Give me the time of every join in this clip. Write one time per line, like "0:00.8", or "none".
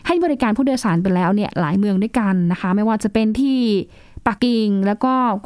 0:04.4

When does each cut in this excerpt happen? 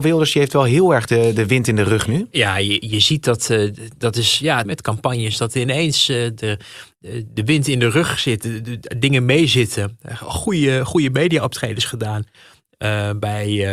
0:04.6

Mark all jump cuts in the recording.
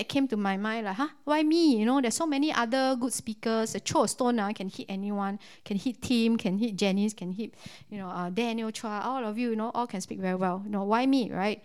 none

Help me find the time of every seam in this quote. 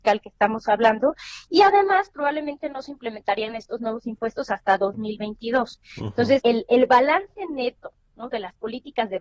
0:06.4

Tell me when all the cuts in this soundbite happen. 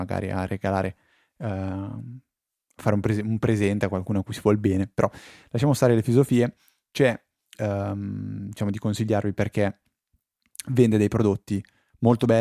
0:07.5

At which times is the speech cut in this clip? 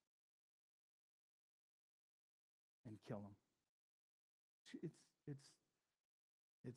none

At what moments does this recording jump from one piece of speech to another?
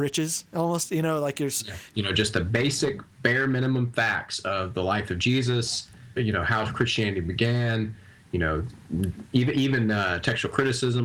0:01.9
0:06.2

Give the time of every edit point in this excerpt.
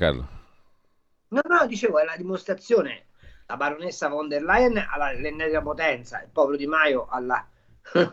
none

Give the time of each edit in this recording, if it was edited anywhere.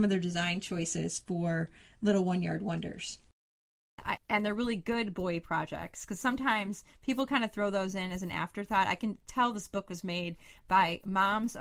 0:04.2

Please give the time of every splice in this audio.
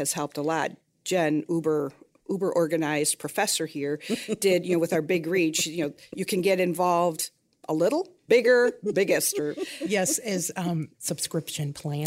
0:08.3
0:10.9

